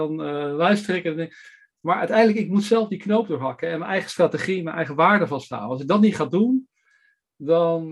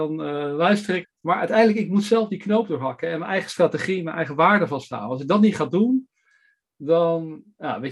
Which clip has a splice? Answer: second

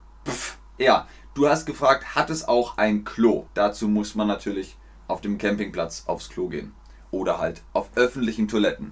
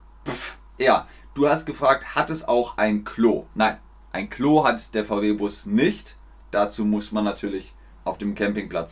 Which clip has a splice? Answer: first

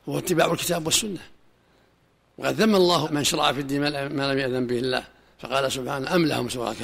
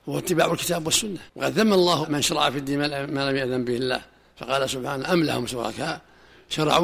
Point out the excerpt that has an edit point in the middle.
second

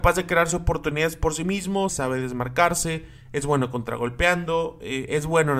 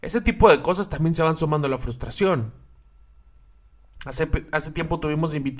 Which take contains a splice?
first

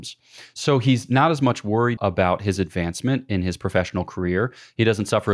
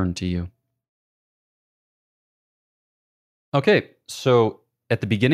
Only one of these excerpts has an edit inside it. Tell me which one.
first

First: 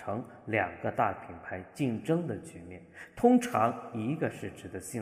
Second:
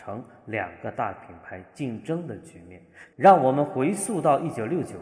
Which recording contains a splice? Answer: second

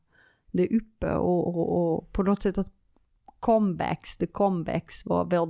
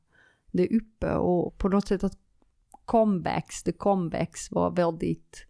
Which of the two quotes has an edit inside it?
second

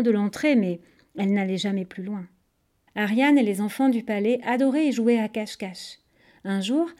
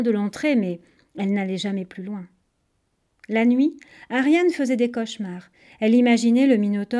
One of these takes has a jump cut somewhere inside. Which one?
first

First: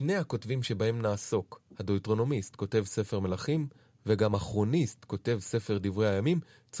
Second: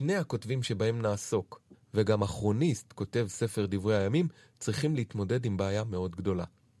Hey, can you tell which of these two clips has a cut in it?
second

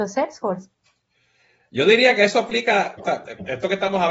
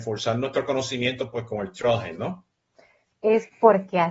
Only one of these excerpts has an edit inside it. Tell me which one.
second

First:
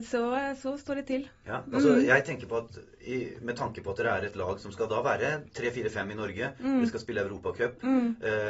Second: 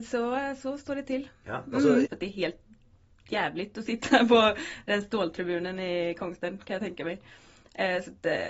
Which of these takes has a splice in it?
second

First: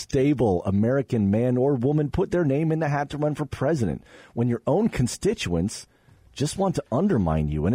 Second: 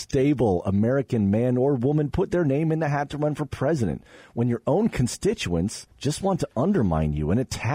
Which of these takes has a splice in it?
second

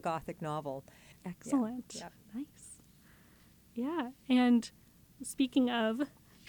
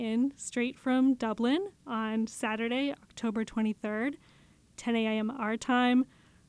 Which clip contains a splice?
first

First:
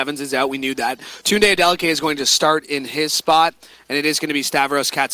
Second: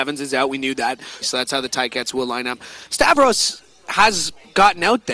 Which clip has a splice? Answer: second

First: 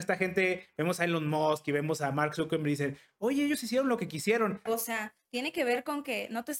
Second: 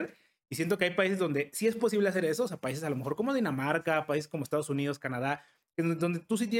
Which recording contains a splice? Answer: first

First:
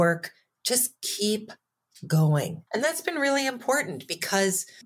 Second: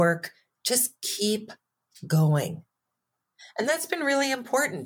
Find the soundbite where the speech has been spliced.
first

